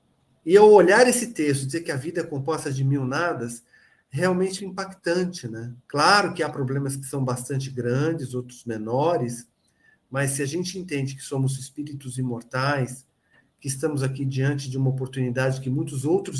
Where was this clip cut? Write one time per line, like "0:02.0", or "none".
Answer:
0:04.6
0:05.8